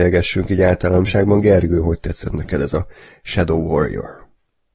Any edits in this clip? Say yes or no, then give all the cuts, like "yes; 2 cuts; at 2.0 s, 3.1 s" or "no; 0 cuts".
no; 0 cuts